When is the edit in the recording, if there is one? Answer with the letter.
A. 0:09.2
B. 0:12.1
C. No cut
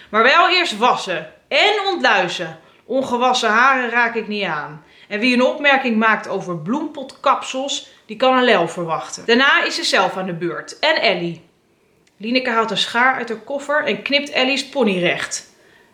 A